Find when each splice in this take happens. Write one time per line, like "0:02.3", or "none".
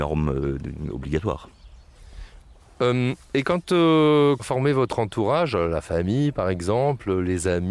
0:03.2
0:04.4